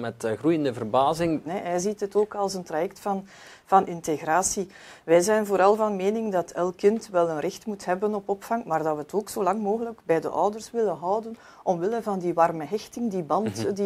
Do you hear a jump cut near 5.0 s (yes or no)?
no